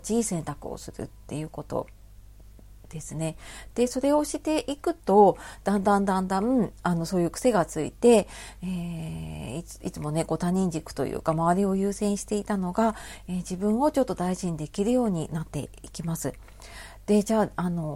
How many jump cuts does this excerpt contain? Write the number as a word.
zero